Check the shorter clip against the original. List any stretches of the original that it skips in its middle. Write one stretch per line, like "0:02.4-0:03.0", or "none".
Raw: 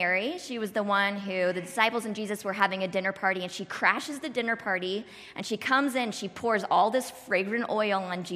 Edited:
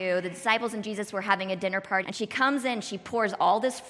0:03.3-0:05.3